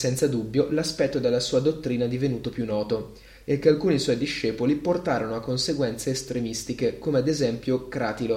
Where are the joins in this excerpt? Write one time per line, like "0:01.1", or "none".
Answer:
none